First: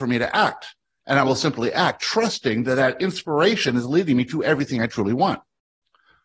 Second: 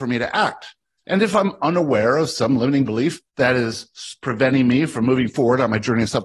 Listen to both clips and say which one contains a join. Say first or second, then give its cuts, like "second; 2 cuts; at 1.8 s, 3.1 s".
second; 2 cuts; at 1.0 s, 3.3 s